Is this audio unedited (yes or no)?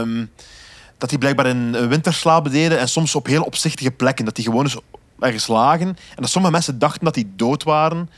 yes